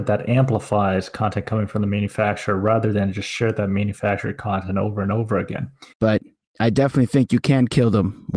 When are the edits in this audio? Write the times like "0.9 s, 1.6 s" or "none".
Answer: 5.9 s